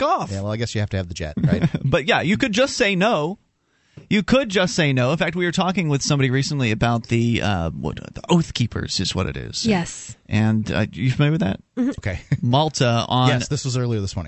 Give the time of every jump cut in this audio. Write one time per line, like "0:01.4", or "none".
0:12.0